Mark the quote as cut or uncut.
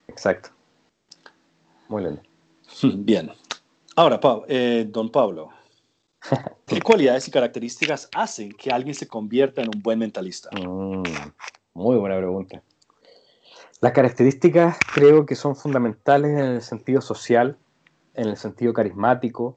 cut